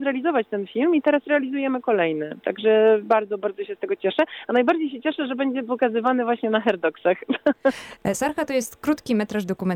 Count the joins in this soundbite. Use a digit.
0